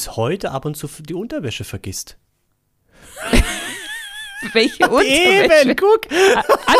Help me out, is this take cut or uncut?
uncut